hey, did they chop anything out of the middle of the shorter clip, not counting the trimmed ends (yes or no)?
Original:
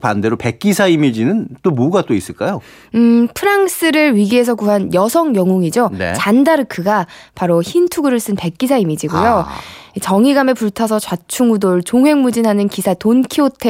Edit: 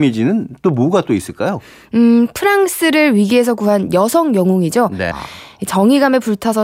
yes